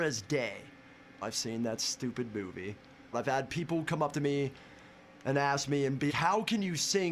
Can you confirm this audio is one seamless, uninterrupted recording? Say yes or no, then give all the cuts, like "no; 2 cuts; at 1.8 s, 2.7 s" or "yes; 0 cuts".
no; 3 cuts; at 1.2 s, 3.1 s, 6.1 s